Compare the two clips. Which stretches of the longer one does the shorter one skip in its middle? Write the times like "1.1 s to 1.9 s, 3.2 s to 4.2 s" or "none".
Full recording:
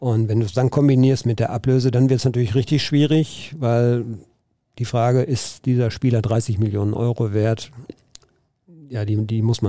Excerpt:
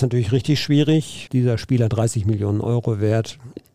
3.5 s to 5.6 s